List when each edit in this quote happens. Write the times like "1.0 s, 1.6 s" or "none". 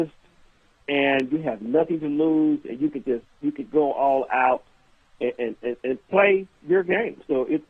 3.7 s

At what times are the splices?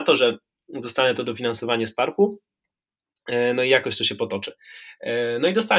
none

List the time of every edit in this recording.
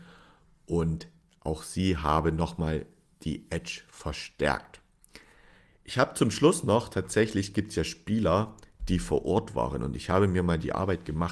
none

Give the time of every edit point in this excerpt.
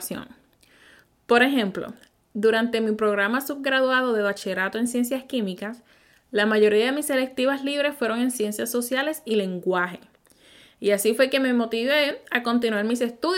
none

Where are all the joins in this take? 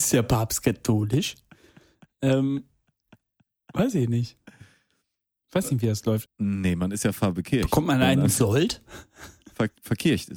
6.3 s

